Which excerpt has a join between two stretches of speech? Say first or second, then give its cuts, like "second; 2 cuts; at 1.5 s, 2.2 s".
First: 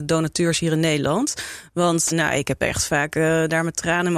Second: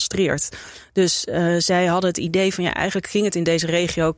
first; 1 cut; at 2.1 s